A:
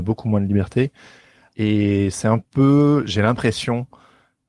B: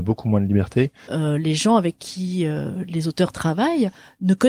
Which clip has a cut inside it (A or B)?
B